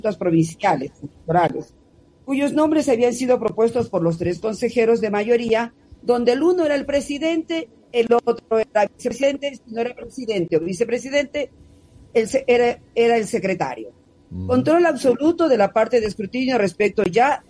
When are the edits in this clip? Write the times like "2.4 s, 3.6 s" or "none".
12.1 s